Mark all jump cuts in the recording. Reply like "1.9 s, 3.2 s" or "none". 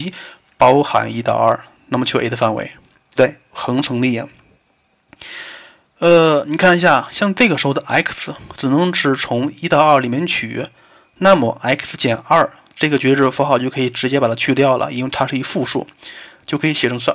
3.2 s